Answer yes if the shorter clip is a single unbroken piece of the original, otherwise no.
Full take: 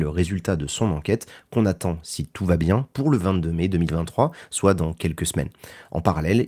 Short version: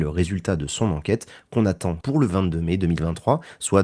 no